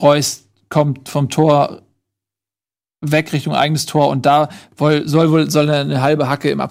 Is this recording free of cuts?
yes; 0 cuts

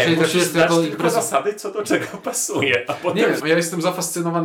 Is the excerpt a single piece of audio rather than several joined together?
no; 1 cut; at 3.4 s

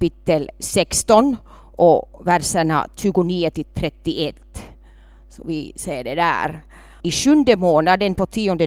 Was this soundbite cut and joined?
yes; 1 cut; at 7.0 s

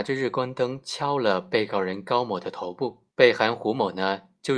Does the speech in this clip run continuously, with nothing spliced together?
no; 1 cut; at 3.1 s

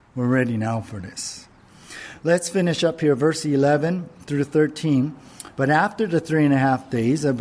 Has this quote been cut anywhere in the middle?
no; 0 cuts

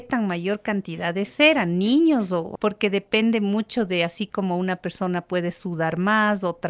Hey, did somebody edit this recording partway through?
yes; 1 cut; at 2.6 s

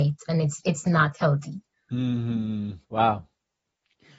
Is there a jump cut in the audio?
yes; 1 cut; at 2.8 s

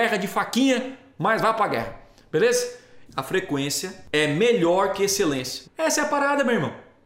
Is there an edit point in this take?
yes; 2 cuts; at 3.1 s, 5.6 s

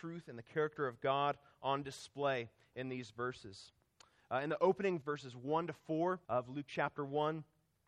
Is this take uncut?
no; 2 cuts; at 5.0 s, 6.2 s

